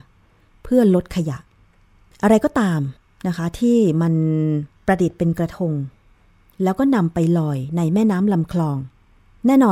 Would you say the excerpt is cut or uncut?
uncut